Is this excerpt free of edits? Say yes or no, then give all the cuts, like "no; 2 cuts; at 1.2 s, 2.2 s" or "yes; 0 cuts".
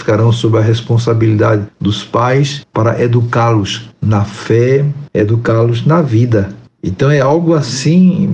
yes; 0 cuts